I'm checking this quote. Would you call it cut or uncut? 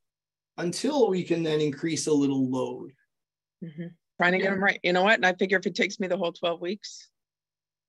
cut